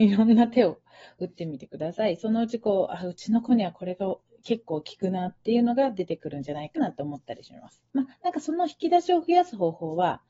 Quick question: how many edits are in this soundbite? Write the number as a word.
two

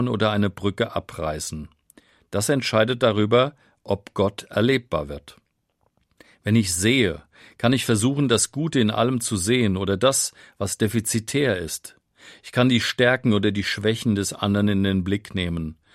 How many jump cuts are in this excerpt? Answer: zero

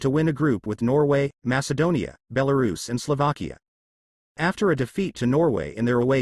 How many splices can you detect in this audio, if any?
one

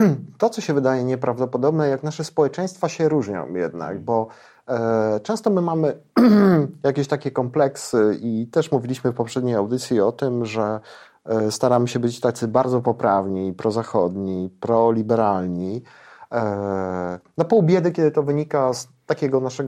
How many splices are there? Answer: zero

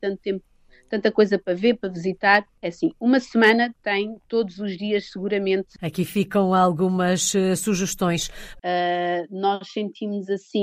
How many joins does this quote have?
two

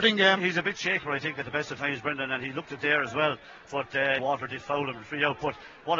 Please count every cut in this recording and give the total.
two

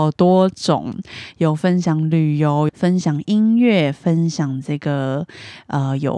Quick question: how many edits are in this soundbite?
one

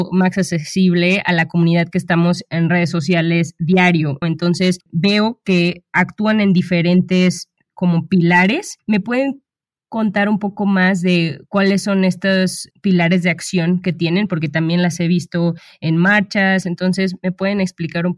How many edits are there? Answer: one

